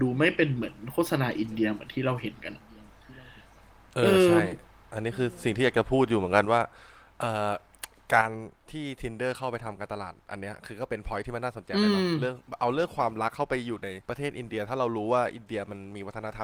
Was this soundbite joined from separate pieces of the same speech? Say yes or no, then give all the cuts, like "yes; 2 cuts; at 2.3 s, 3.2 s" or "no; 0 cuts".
yes; 1 cut; at 14.0 s